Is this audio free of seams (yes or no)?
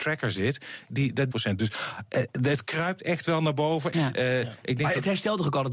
no